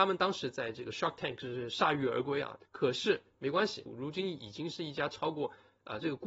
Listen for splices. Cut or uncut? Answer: cut